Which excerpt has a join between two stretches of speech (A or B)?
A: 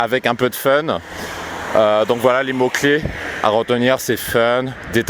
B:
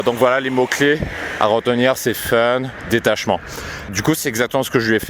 B